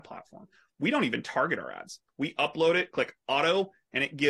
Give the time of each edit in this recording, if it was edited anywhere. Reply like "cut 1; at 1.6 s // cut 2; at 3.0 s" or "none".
cut 1; at 2.1 s